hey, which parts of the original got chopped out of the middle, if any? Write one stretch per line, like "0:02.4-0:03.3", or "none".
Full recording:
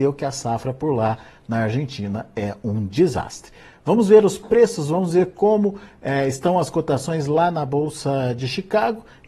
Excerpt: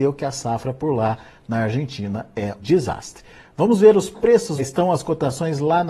0:02.6-0:02.9
0:04.9-0:06.2